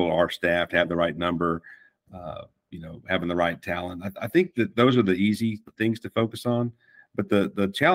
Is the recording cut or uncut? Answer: uncut